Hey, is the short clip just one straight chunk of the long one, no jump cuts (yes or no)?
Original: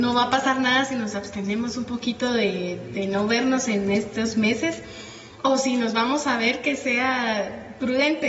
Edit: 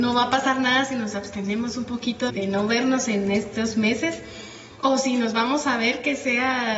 no